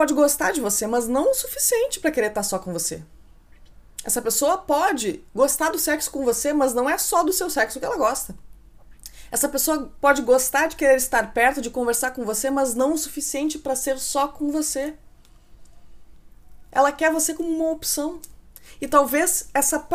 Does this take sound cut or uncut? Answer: uncut